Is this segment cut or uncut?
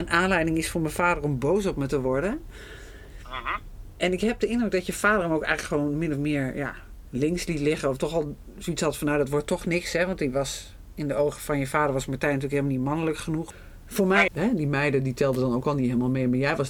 cut